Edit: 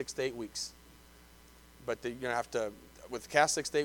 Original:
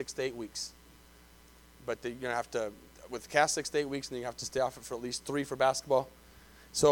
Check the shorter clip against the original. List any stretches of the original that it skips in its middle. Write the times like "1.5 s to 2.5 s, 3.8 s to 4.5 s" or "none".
none